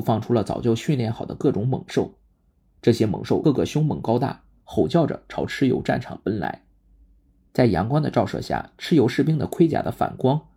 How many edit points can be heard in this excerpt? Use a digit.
1